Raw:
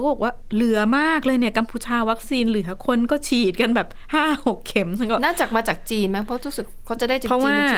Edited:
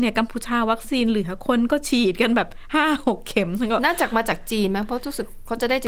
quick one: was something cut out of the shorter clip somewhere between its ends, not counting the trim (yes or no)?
no